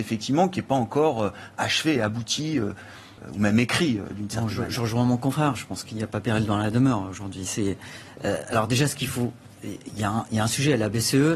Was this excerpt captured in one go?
yes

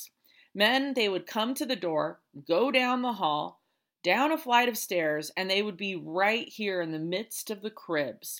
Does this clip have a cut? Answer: no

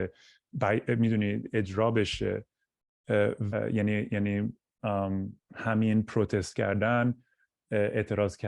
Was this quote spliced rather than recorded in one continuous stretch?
yes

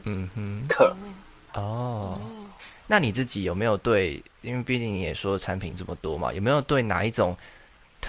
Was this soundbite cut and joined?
yes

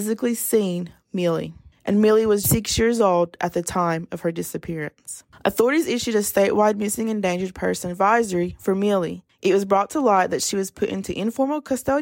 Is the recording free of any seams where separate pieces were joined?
no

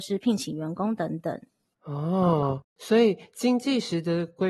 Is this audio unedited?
yes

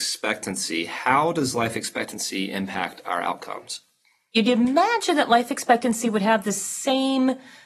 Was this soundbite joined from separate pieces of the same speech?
no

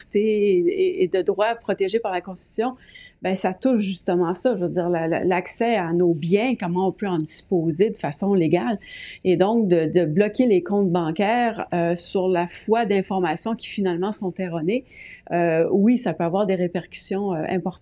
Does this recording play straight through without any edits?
yes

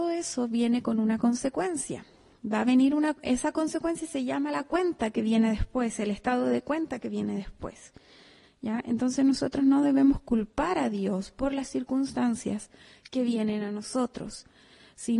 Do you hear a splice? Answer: no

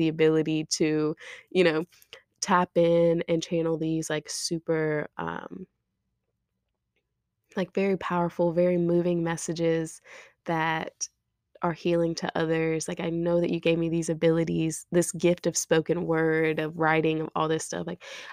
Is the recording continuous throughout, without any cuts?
yes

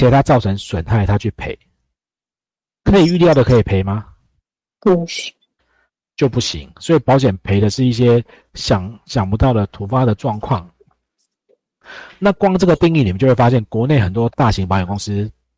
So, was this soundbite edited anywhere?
no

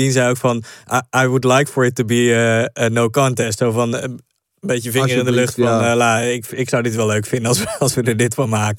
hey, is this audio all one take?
yes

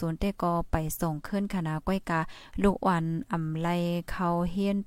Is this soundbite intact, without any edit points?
yes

